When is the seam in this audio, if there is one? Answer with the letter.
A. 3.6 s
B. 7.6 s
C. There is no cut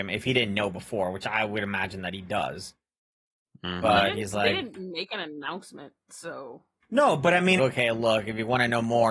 B